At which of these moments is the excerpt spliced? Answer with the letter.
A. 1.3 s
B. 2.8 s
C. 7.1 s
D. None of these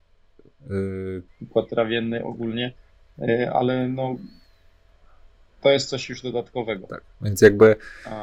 A